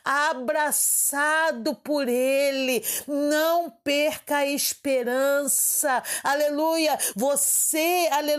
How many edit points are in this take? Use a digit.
1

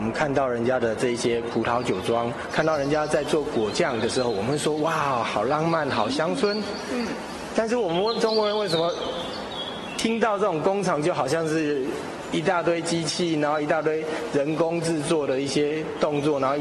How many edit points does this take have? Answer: 1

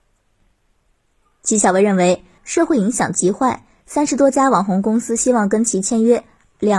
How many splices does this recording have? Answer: 2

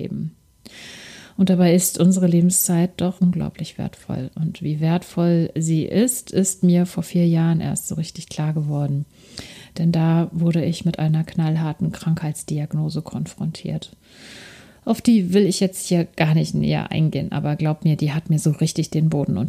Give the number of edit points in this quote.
1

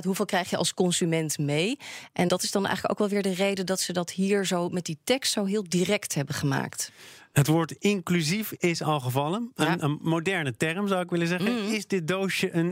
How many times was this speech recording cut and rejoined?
1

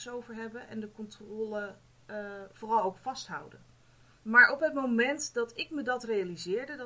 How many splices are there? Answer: 1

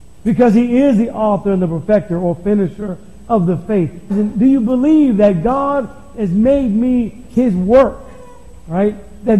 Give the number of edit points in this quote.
1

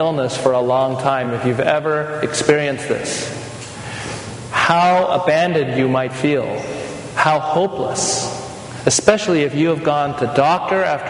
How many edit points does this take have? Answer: 0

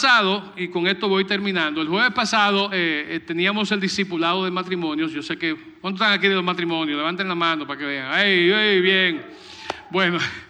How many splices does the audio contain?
0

